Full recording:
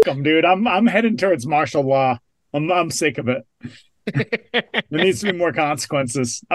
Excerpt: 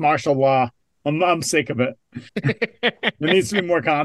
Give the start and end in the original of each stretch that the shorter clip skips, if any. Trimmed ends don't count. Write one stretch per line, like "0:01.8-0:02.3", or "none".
0:03.8-0:04.0

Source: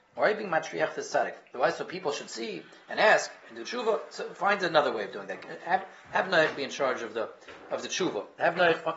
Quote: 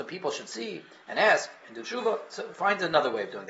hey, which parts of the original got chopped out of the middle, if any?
none

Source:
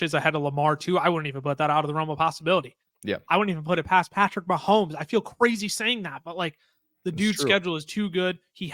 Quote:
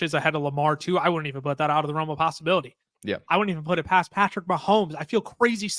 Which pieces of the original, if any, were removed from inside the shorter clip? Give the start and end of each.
none

